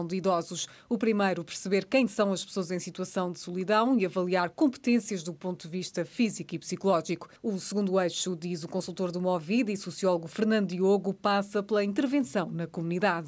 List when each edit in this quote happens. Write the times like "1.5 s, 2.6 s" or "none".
none